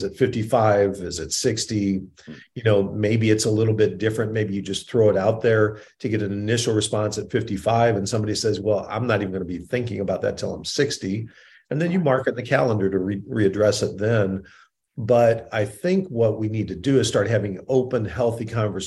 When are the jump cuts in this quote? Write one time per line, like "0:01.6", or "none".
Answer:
none